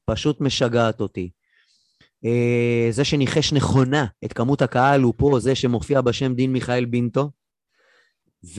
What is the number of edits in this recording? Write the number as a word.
one